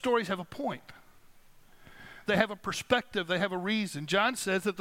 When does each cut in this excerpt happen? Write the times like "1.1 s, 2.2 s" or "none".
2.3 s

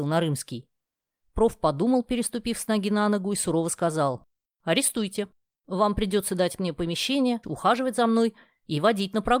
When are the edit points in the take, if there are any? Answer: 4.5 s, 7.4 s

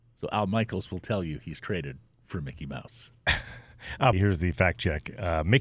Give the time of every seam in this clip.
4.1 s

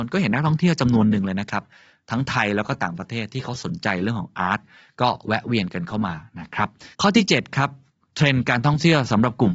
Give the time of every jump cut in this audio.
6.9 s

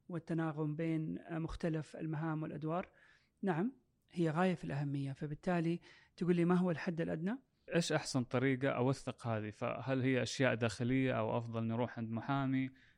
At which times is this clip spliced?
7.7 s

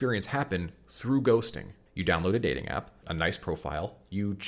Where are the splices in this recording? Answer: 1.9 s, 3.0 s

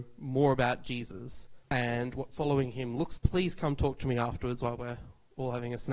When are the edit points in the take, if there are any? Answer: 1.6 s, 3.2 s

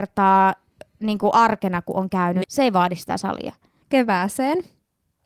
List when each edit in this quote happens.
2.4 s, 3.8 s

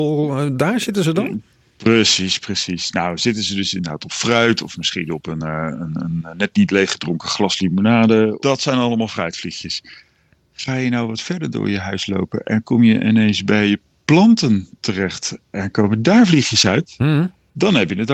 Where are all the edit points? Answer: none

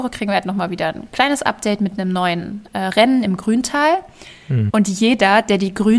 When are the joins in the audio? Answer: 4.7 s

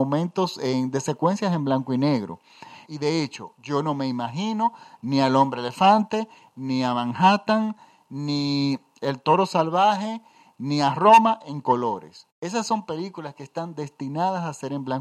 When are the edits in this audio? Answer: 2.9 s

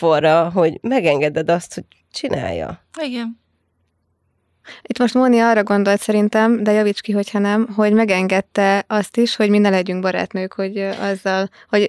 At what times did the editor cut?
none

